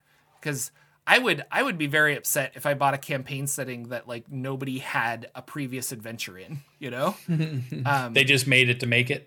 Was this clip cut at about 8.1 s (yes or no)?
no